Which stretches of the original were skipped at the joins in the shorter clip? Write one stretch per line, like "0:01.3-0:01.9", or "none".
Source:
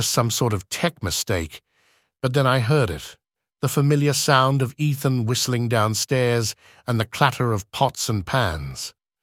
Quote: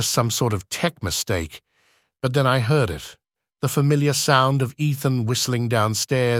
none